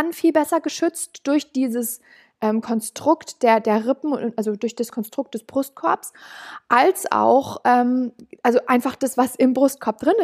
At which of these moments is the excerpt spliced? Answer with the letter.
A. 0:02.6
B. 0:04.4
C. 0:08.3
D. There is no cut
D